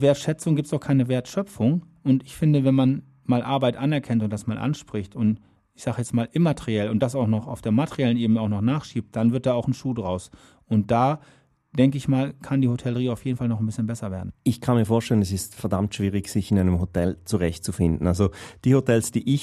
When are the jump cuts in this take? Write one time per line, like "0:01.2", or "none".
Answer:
none